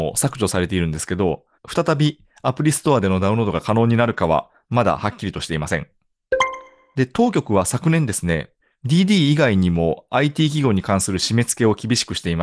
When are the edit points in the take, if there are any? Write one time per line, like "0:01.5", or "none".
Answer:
0:01.5

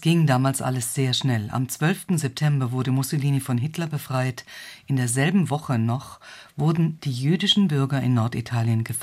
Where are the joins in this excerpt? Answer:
none

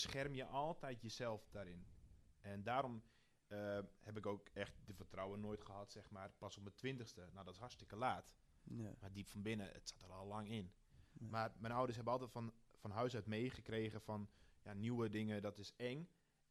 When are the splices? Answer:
none

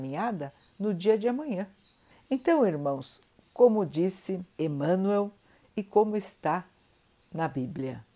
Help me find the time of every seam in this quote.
0:02.1
0:04.5

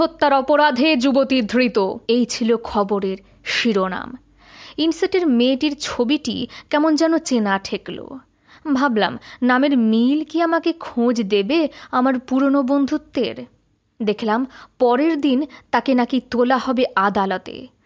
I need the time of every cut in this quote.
0:02.0
0:07.2

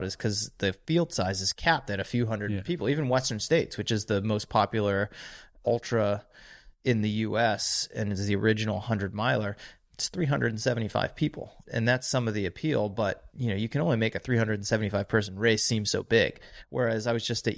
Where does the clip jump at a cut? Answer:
none

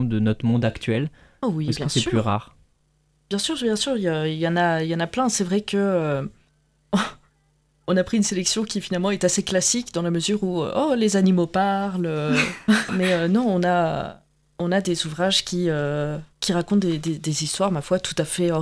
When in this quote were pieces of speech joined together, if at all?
0:12.9
0:16.3

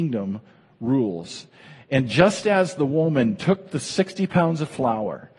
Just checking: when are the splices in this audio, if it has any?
none

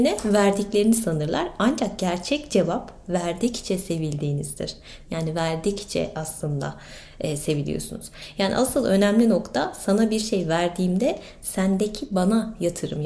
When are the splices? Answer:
0:05.0

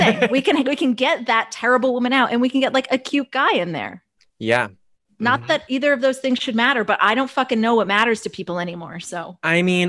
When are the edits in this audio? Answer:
none

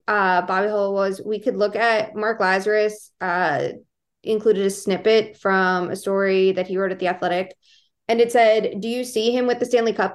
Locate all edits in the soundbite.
none

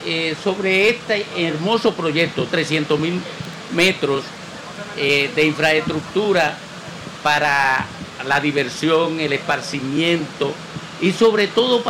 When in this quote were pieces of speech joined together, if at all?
0:01.3
0:02.5

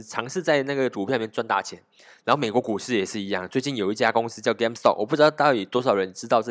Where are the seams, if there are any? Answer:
none

